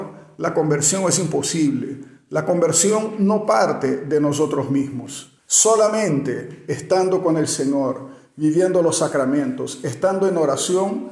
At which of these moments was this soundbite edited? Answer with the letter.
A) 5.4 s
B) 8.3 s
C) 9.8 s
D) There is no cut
A